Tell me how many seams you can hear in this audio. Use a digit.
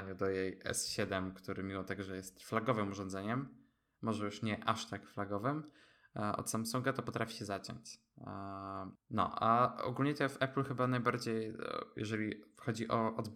1